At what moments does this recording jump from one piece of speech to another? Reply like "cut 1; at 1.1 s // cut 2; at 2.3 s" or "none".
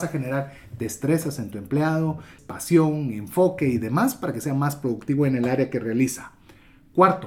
cut 1; at 2.4 s